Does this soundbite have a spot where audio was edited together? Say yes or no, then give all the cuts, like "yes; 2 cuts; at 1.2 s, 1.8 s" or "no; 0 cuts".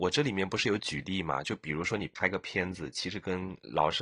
no; 0 cuts